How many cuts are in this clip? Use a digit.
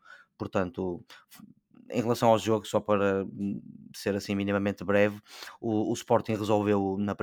0